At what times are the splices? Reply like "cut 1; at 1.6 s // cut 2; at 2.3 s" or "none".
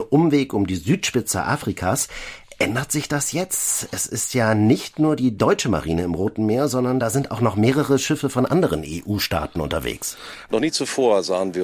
cut 1; at 10.5 s